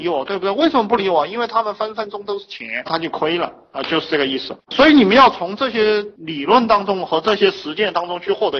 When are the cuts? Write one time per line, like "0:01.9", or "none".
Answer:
0:02.9
0:04.7